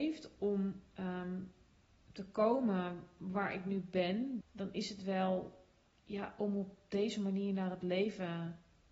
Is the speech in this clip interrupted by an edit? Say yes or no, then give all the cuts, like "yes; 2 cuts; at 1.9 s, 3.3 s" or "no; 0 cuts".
yes; 1 cut; at 4.4 s